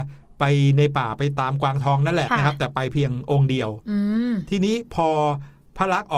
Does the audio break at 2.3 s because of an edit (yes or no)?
yes